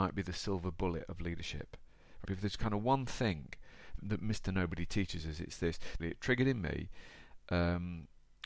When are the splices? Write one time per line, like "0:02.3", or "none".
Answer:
0:02.2
0:04.0
0:06.0